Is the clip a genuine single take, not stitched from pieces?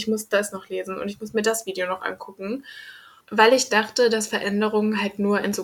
no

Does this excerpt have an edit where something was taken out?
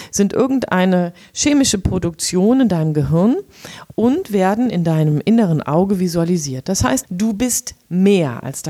yes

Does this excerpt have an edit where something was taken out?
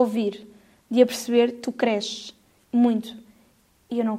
yes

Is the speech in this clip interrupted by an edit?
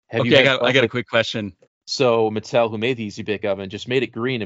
yes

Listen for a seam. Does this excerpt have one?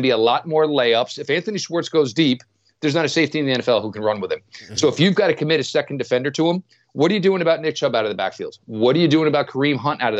no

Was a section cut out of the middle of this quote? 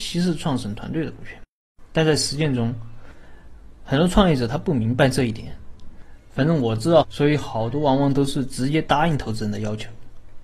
yes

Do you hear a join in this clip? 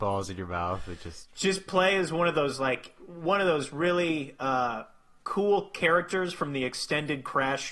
no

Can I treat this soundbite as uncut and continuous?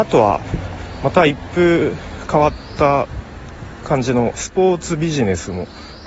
yes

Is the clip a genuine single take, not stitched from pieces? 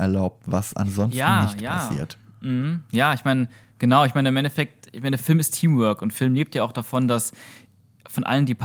yes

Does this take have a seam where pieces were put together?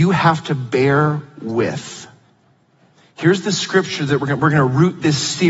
no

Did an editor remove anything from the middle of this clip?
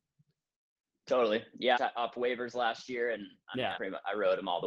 yes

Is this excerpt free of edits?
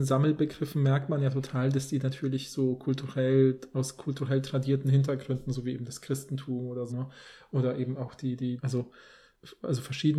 no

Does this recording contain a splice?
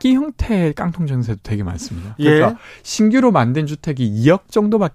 no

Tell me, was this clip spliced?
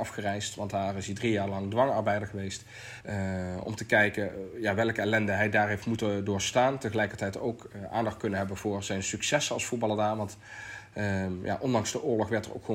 yes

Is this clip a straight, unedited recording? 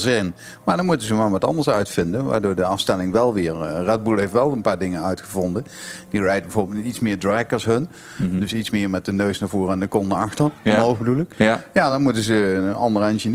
yes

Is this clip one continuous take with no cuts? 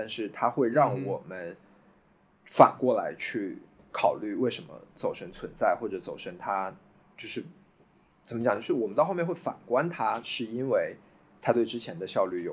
yes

